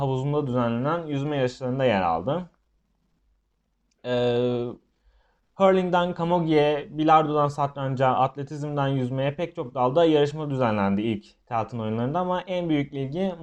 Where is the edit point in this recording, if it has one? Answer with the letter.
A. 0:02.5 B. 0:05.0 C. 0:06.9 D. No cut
D